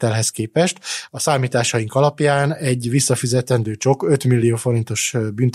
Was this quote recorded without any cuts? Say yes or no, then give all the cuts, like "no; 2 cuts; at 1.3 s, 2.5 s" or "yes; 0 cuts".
no; 1 cut; at 1.1 s